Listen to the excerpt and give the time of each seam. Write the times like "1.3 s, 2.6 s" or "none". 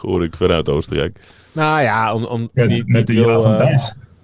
2.5 s